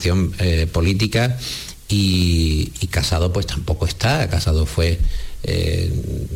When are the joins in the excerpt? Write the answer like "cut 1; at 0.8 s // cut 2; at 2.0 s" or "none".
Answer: none